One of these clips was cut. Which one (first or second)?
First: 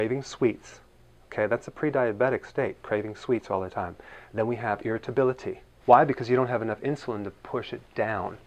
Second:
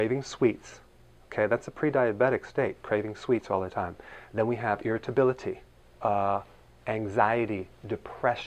first